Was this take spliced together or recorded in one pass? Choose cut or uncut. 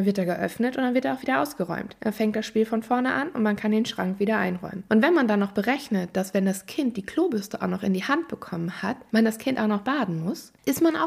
cut